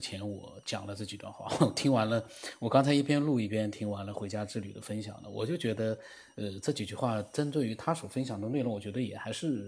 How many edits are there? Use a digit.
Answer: 0